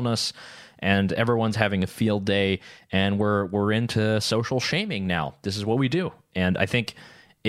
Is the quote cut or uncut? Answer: uncut